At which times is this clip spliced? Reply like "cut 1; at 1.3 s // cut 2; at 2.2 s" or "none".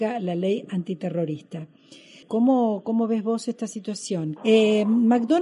cut 1; at 2.2 s // cut 2; at 4.4 s